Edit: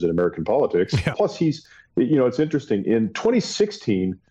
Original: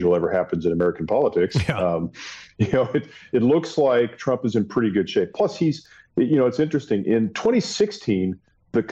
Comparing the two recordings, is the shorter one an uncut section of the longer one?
no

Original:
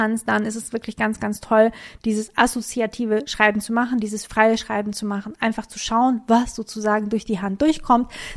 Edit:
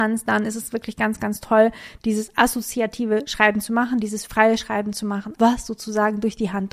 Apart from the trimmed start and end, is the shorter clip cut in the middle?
yes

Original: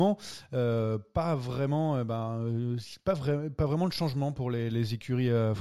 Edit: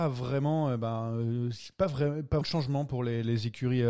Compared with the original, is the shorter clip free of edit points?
no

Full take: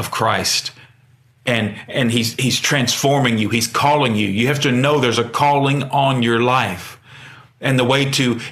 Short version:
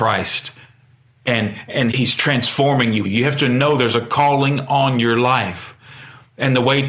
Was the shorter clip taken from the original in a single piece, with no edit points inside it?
no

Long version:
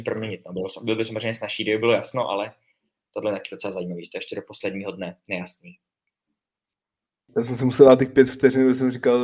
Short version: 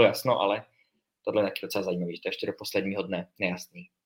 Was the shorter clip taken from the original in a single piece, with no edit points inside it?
yes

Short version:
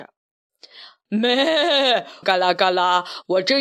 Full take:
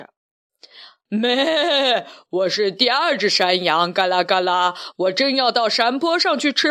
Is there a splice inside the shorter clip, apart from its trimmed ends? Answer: yes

